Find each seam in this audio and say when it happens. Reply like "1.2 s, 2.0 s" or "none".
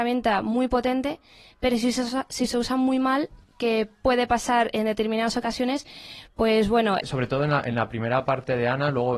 7.0 s